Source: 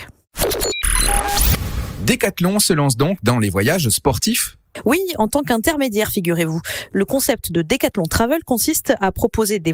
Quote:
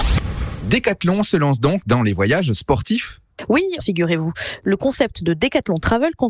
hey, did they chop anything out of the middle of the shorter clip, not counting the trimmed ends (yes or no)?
yes